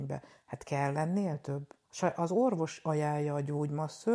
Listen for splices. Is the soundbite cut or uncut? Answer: cut